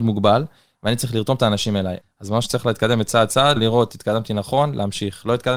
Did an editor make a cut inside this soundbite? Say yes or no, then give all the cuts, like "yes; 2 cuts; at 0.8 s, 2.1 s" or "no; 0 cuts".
yes; 2 cuts; at 2.0 s, 3.6 s